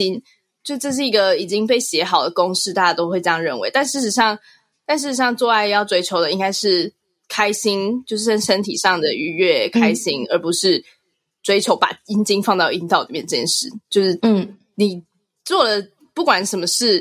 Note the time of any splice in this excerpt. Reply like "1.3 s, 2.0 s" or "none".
none

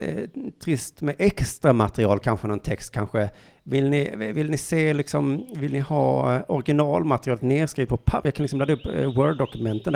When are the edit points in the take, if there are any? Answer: 2.2 s

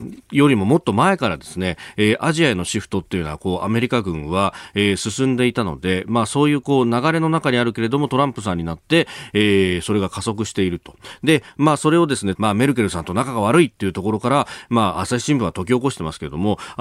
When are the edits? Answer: 12.4 s

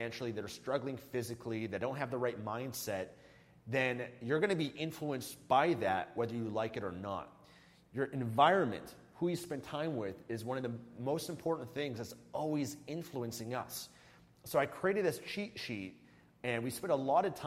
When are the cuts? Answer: none

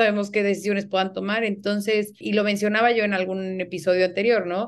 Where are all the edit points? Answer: 2.2 s

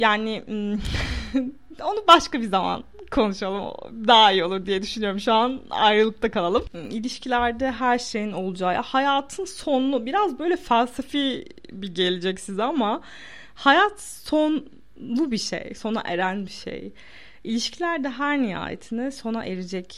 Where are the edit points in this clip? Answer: none

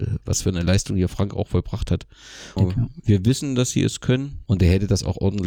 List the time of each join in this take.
2.6 s, 4.5 s

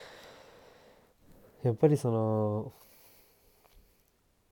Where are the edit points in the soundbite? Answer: none

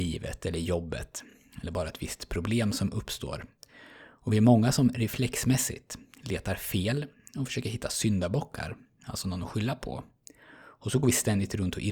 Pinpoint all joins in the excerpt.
none

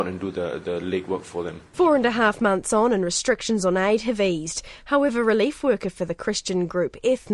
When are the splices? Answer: 1.7 s

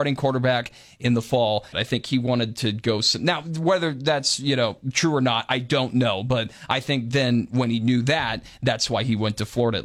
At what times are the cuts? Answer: 1.7 s

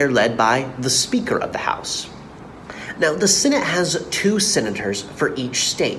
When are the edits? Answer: none

